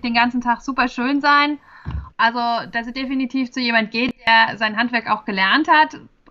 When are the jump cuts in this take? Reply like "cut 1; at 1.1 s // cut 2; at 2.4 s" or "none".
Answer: cut 1; at 2.1 s